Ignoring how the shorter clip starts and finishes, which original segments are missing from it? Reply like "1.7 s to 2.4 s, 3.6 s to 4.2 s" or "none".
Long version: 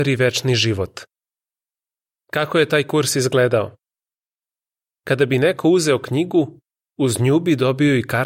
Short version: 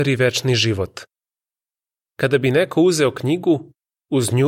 2.1 s to 5.0 s